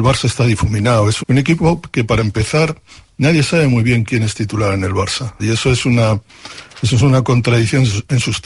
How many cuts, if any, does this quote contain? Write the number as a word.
two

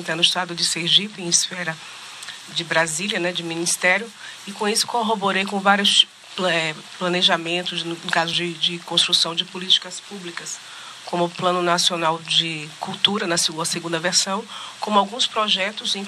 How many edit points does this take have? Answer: zero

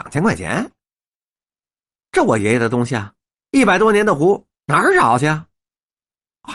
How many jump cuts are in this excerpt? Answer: one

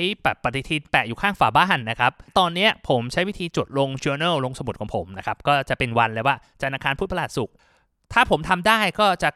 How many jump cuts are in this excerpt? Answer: zero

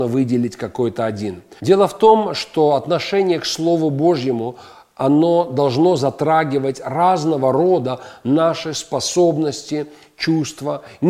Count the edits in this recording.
one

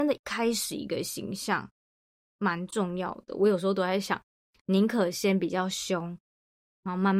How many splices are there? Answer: zero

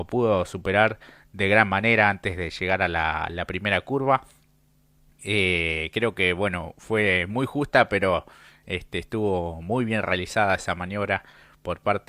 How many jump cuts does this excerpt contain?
zero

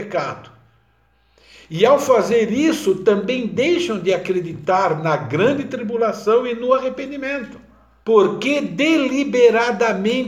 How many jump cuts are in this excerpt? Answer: one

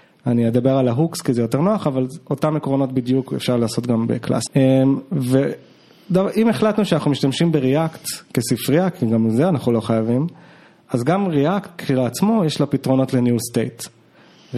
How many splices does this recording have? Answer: one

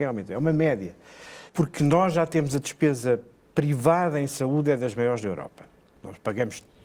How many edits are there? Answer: one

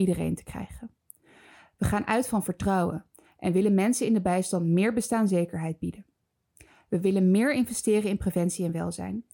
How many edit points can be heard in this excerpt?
zero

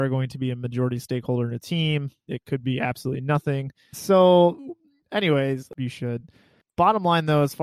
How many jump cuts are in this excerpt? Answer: three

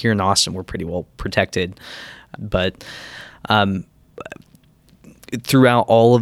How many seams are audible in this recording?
one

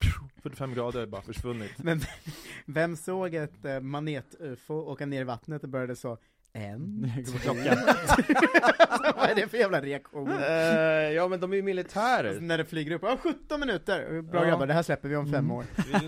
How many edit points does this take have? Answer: zero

